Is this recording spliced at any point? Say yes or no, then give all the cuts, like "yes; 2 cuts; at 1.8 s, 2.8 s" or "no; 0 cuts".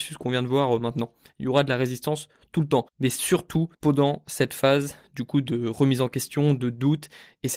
yes; 1 cut; at 3.7 s